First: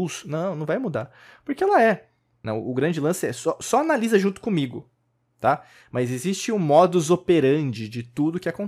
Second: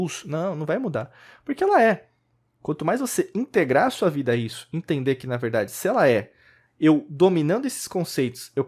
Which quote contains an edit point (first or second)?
first